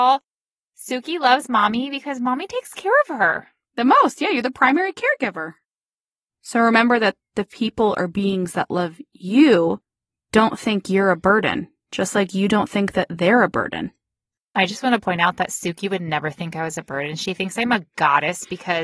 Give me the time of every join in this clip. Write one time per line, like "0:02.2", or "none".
0:06.3